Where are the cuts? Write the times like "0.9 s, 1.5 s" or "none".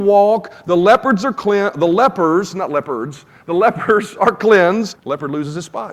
4.9 s